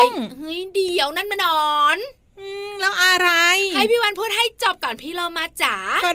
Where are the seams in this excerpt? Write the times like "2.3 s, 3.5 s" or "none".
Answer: 1.4 s